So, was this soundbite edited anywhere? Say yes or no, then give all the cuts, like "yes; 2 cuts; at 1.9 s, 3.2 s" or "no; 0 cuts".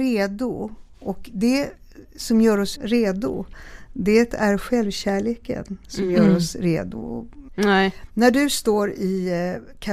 yes; 2 cuts; at 2.8 s, 7.5 s